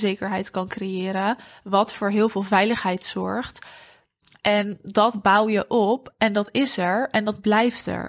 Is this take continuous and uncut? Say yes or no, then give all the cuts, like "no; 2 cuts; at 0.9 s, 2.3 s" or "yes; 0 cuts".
yes; 0 cuts